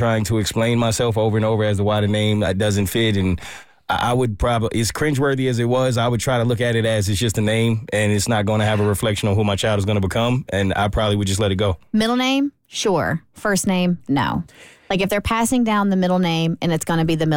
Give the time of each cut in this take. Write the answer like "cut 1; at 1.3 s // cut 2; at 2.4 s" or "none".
none